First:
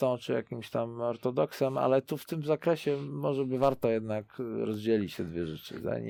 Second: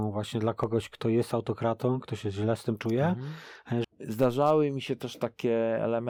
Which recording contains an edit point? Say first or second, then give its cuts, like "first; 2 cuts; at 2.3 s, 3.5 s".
second; 1 cut; at 3.8 s